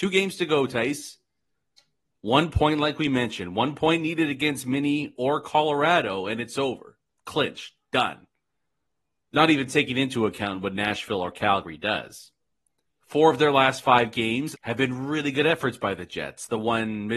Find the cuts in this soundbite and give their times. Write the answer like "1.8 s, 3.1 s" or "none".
13.0 s, 14.5 s

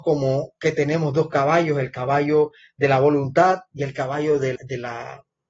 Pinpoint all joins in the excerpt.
4.6 s

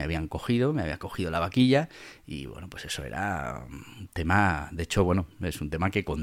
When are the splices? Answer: none

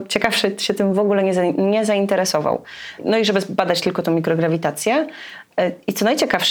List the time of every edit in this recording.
3.0 s

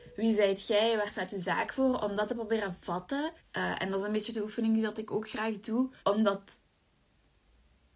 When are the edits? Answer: 3.4 s, 6.0 s

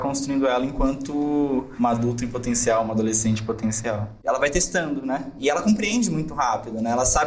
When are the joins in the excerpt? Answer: 4.2 s

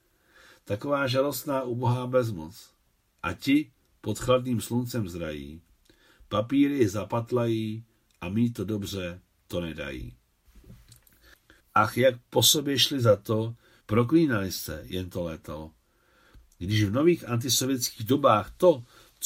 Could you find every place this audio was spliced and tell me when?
3.2 s, 11.6 s, 13.8 s

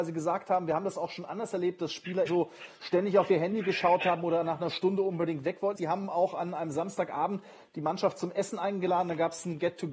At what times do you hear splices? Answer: 2.3 s, 5.8 s

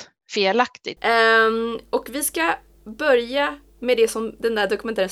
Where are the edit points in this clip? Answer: 1.0 s

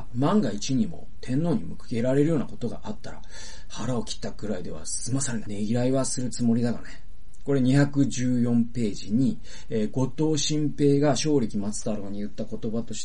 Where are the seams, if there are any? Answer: 5.5 s

